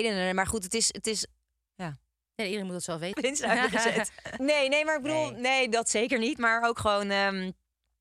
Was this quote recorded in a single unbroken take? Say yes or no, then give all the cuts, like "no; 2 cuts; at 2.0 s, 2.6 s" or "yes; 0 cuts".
no; 3 cuts; at 1.7 s, 3.1 s, 4.4 s